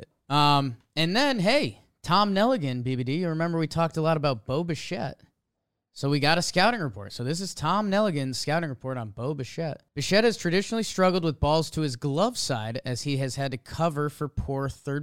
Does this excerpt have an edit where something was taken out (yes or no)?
yes